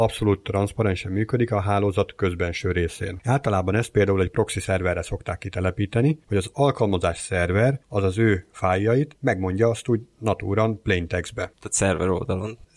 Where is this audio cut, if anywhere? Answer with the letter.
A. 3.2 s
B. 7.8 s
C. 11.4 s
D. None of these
D